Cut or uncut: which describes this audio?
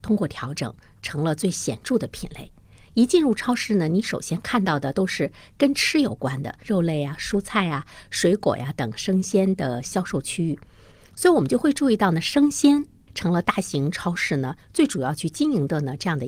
cut